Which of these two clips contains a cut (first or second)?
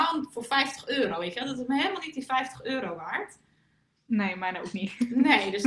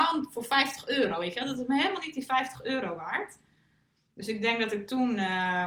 first